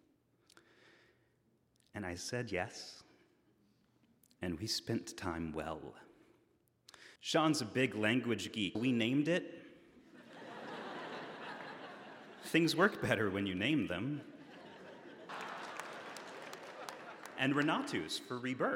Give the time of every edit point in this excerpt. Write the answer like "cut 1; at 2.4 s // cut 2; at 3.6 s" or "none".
cut 1; at 7.2 s // cut 2; at 8.7 s // cut 3; at 15.3 s